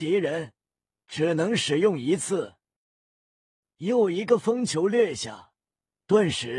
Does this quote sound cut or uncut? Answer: cut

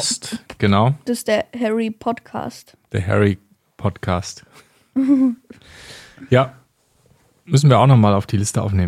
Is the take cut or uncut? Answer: uncut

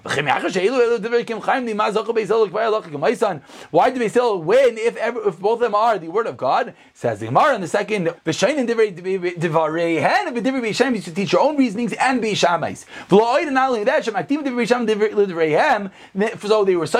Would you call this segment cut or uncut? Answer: cut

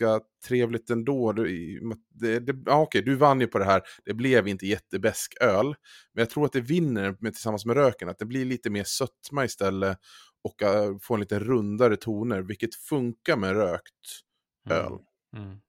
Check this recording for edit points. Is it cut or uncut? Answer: uncut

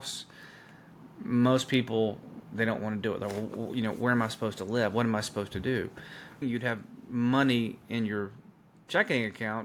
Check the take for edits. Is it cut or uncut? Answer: cut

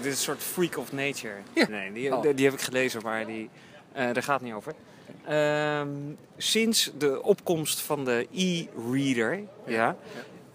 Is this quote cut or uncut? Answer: cut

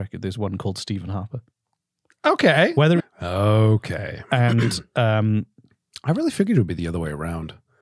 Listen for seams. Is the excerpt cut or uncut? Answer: cut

